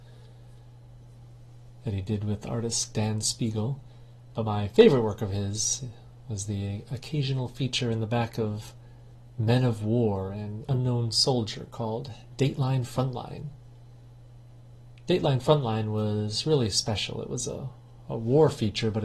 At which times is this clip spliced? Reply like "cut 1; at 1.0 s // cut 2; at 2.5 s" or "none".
cut 1; at 4.3 s